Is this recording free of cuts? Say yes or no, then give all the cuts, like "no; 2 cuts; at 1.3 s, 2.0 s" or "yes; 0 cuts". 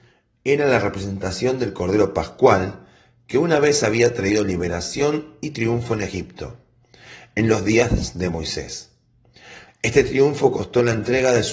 no; 1 cut; at 9.7 s